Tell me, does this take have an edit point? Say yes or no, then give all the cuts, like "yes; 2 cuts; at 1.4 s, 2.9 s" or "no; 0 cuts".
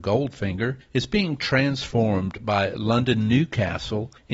no; 0 cuts